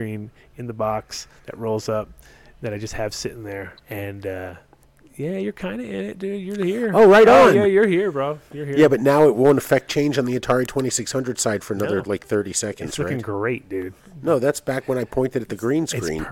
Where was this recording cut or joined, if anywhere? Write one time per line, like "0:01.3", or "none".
0:03.8